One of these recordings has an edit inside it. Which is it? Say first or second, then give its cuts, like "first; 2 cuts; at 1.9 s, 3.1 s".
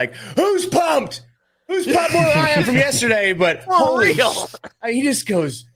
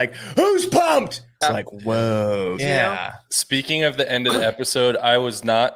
second; 2 cuts; at 1.4 s, 2.6 s